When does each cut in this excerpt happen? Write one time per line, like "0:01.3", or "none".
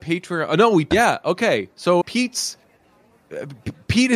0:00.9
0:02.0